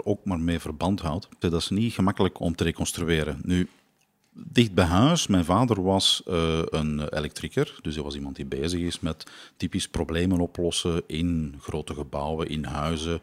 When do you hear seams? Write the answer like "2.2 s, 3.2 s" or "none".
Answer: 1.4 s